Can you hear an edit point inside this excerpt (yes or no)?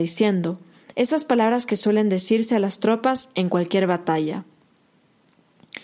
yes